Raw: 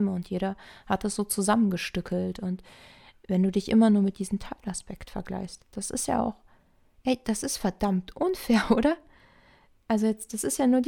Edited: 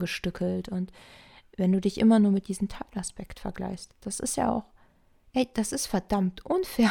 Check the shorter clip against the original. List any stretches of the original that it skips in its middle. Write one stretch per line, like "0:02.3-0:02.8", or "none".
none